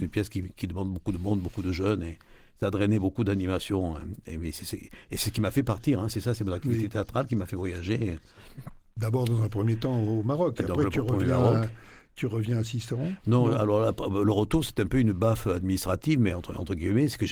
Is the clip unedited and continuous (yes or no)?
yes